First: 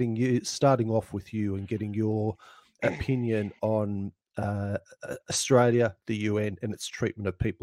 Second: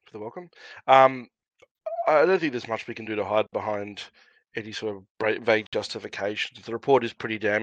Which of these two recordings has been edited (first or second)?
first